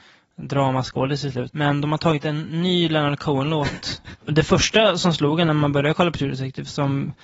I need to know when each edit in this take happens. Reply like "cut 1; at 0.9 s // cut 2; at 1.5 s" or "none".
cut 1; at 1.5 s // cut 2; at 4.2 s